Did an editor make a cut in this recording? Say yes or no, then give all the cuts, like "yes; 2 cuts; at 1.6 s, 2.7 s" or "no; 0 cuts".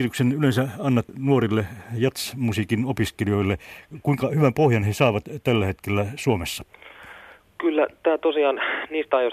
no; 0 cuts